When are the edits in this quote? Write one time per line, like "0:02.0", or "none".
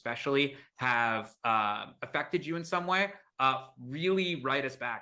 none